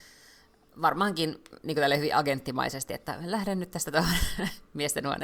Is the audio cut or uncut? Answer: uncut